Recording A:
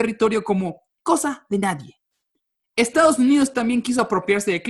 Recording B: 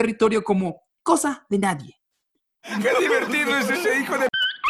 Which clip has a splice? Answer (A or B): B